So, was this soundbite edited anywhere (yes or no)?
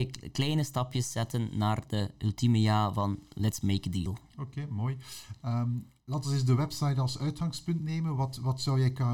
no